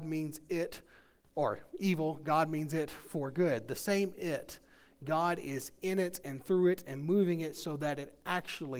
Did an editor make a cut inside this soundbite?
no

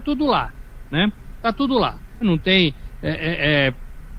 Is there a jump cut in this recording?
yes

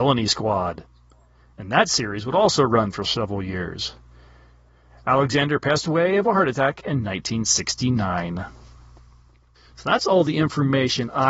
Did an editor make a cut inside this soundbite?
no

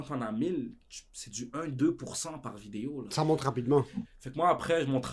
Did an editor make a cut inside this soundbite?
yes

